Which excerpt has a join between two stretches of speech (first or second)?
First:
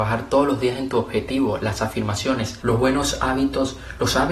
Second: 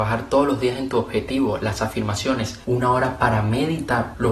first